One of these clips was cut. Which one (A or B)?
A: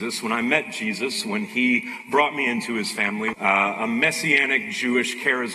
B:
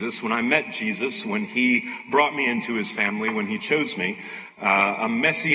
A